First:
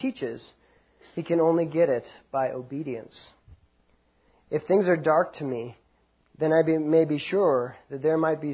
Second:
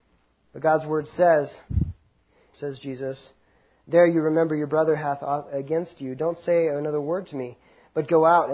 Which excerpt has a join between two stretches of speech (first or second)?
second